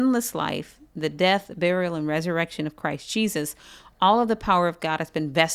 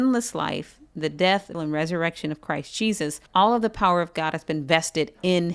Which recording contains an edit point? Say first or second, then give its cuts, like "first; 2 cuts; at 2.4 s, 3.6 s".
second; 2 cuts; at 1.5 s, 3.3 s